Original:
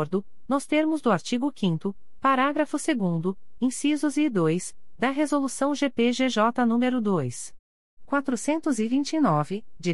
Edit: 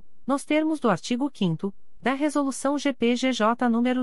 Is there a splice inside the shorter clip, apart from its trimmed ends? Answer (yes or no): yes